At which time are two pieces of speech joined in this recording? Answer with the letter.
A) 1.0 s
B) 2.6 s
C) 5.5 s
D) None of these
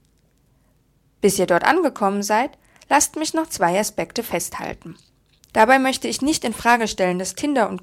C